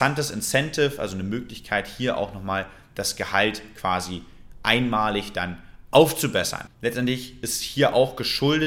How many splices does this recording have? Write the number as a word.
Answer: one